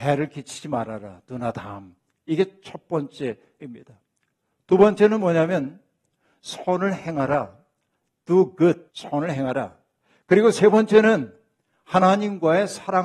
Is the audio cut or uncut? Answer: cut